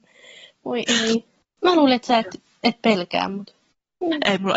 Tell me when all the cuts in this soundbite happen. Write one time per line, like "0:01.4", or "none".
none